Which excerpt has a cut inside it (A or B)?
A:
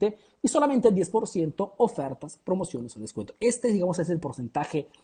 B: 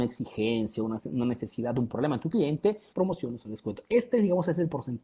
B